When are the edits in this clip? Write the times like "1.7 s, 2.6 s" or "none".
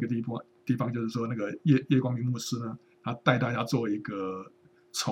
none